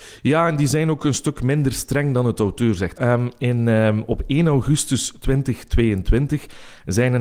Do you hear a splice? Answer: yes; 1 cut; at 2.9 s

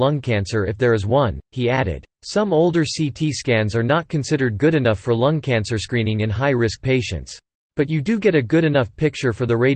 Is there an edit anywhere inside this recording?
yes; 2 cuts; at 2.1 s, 7.7 s

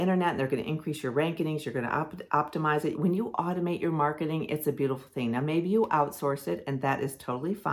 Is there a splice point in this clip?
yes; 1 cut; at 2.9 s

